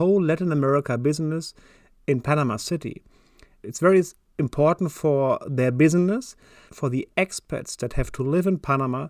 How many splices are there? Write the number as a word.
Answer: two